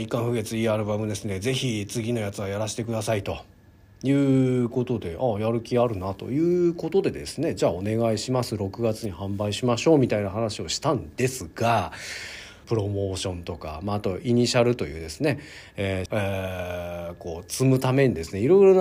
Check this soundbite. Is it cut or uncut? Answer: cut